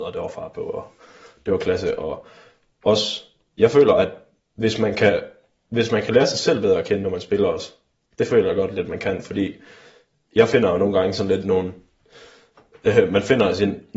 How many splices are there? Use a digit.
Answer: 0